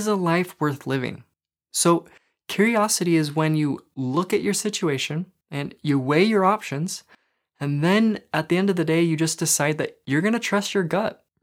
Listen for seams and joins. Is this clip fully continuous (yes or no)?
yes